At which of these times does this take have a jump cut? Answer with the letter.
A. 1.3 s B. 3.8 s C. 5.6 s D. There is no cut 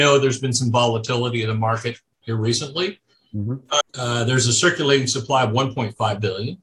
B